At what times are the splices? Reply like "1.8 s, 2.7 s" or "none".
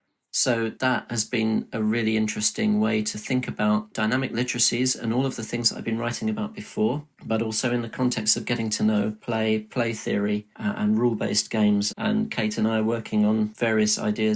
11.9 s